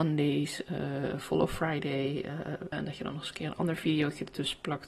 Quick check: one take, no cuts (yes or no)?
no